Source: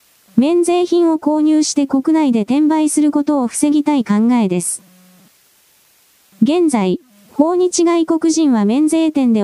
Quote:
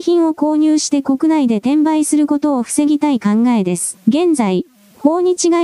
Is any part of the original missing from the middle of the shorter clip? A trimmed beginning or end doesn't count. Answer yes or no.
yes